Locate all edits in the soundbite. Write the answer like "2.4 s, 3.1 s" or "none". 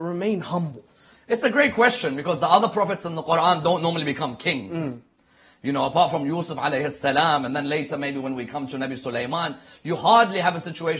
none